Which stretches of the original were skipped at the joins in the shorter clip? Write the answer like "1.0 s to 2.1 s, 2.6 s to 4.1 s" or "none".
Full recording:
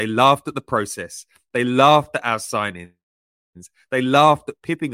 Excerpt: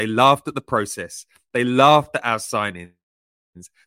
none